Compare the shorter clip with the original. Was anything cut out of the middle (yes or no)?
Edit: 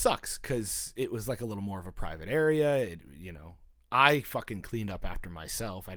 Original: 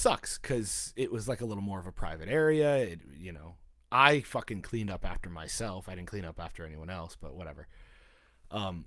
no